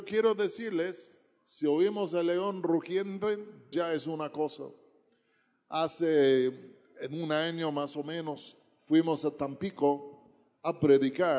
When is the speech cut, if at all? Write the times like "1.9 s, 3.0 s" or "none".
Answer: 3.7 s

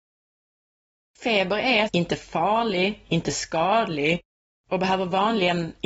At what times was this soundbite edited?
1.9 s

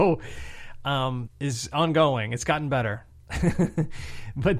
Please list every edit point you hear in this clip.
1.3 s

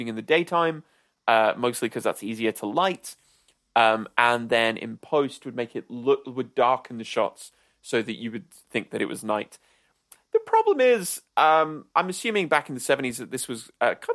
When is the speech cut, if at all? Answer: none

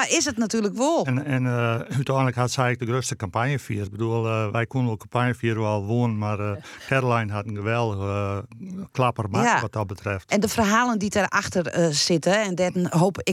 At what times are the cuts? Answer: 1.0 s, 3.9 s

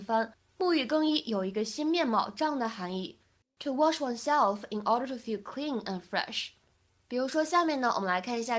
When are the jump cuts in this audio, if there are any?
none

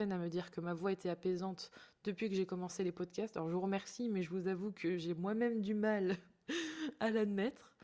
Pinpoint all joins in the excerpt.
none

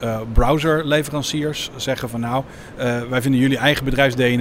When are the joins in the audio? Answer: none

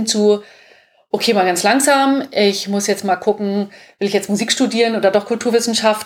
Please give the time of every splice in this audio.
none

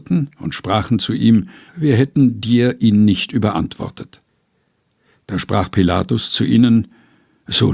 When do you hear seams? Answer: 1.7 s

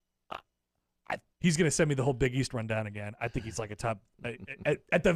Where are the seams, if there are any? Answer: 1.3 s

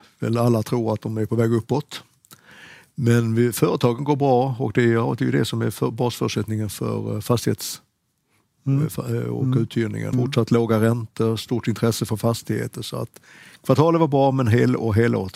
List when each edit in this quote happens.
10.1 s

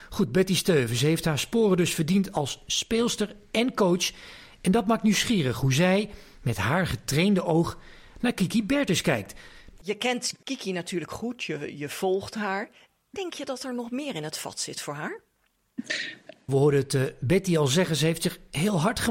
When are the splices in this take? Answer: 9.7 s, 16.5 s

